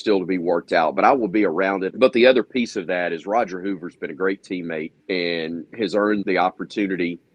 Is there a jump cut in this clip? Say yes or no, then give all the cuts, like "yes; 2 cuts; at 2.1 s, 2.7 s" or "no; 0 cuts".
yes; 3 cuts; at 1.9 s, 5.0 s, 6.2 s